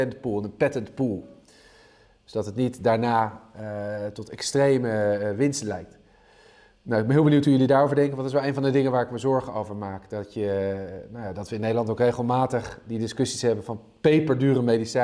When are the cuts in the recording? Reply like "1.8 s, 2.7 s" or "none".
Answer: none

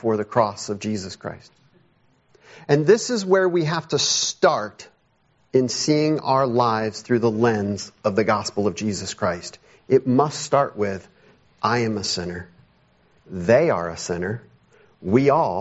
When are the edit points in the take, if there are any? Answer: 13.2 s

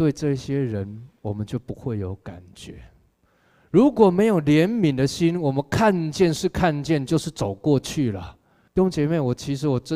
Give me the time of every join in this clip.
8.7 s

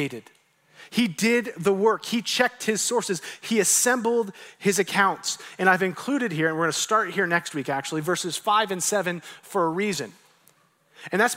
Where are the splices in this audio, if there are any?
none

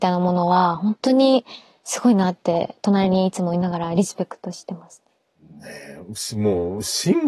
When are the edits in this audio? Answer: none

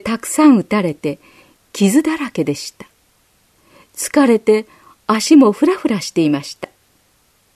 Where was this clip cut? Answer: none

